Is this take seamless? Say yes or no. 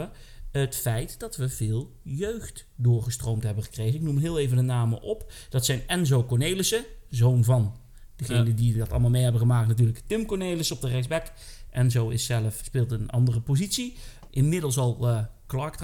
no